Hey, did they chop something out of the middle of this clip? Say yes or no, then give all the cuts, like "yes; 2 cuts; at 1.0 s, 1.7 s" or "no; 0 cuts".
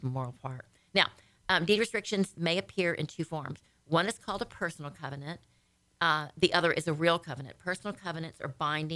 no; 0 cuts